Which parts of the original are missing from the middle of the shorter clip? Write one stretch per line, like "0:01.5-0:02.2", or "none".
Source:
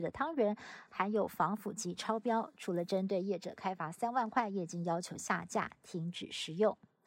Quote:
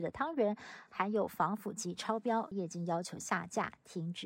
0:02.5-0:04.5